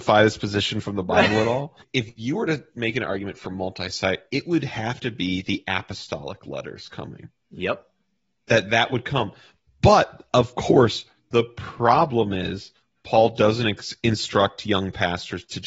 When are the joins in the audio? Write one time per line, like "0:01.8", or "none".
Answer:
none

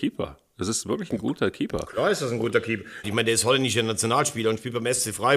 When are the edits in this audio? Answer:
0:03.0

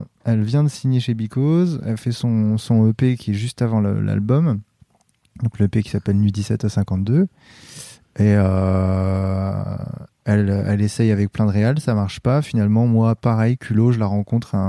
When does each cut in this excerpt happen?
none

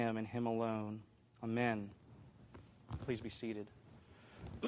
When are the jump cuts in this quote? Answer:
0:01.3

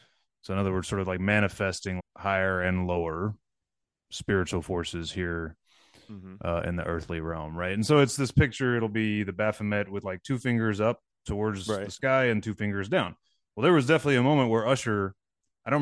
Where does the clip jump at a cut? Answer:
0:02.0

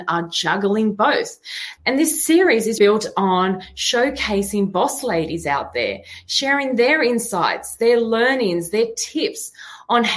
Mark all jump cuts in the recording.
0:01.8
0:02.8

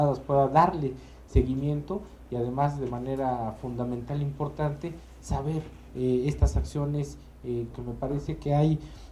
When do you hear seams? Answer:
0:07.7

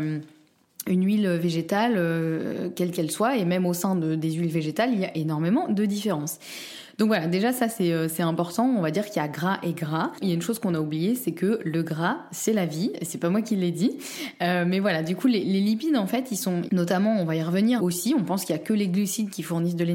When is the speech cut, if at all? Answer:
0:10.2
0:16.7
0:17.8

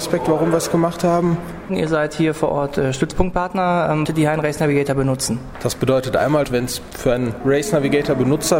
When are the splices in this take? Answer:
0:01.7
0:04.1
0:06.4

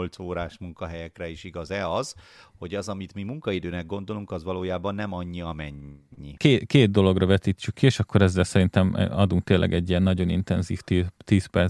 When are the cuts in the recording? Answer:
0:06.4

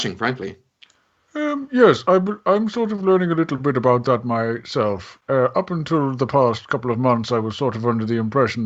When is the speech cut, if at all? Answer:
none

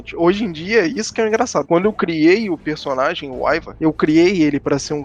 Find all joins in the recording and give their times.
0:01.7

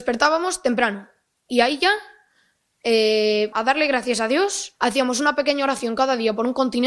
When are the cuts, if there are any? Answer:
0:03.5
0:04.8

